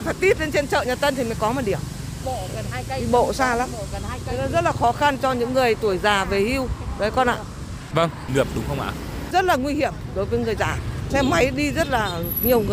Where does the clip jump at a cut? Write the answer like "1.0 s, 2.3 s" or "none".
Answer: 8.3 s, 11.1 s